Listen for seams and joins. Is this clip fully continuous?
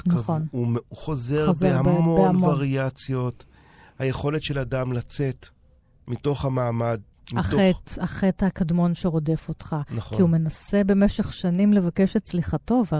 yes; 0 cuts

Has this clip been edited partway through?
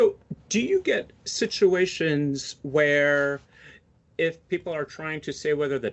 no; 0 cuts

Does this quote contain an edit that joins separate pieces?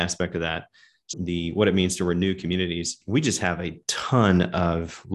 yes; 1 cut; at 1.1 s

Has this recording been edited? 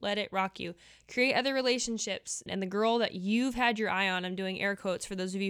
yes; 1 cut; at 2.5 s

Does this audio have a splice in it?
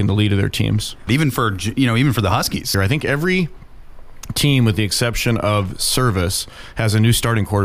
yes; 2 cuts; at 1.1 s, 2.7 s

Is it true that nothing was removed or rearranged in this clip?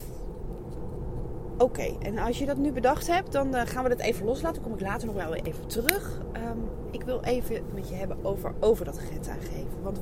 yes; 0 cuts

